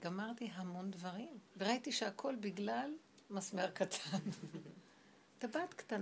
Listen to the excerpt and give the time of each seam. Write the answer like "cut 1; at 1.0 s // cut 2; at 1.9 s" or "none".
cut 1; at 1.5 s